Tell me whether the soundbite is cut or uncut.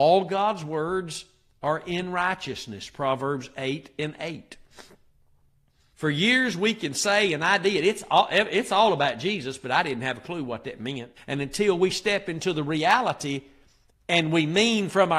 cut